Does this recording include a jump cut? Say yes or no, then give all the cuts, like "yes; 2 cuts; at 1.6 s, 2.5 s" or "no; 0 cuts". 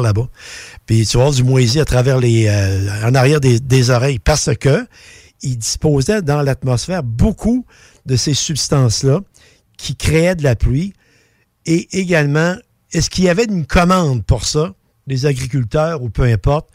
no; 0 cuts